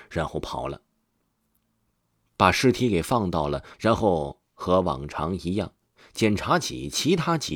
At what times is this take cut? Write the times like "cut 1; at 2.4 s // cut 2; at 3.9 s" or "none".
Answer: cut 1; at 3.7 s

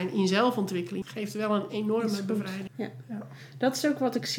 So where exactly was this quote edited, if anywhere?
cut 1; at 1.0 s // cut 2; at 2.7 s

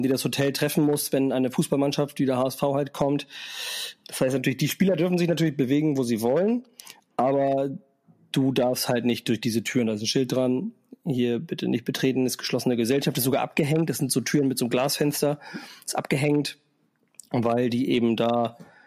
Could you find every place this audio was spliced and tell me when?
cut 1; at 4.0 s

